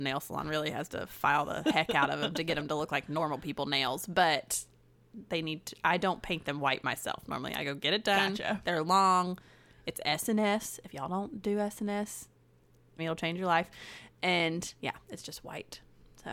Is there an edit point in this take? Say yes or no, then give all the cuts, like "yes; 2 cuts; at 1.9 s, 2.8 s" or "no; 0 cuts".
yes; 1 cut; at 13.0 s